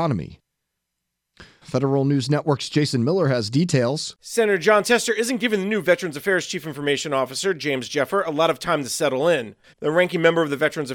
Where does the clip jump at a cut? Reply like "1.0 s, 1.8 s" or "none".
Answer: 1.6 s, 9.7 s